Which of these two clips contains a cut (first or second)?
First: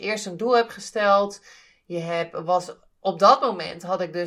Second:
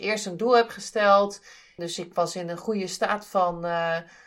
second